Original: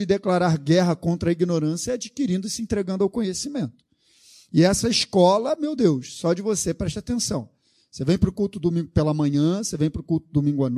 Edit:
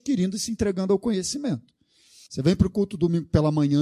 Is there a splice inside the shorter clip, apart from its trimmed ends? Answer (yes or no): yes